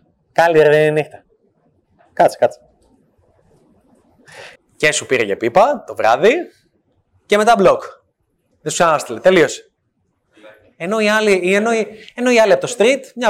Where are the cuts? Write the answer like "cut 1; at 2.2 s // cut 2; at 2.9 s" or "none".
cut 1; at 4.6 s